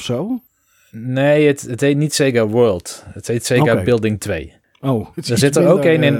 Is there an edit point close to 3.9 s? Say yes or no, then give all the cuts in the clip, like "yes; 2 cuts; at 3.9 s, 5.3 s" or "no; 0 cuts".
no; 1 cut; at 5.1 s